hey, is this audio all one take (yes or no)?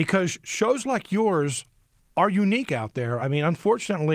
yes